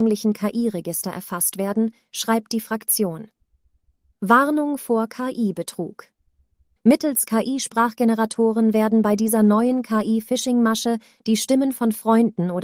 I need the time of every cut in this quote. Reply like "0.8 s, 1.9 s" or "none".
6.8 s